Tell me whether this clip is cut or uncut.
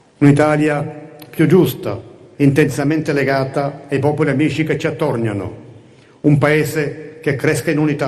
cut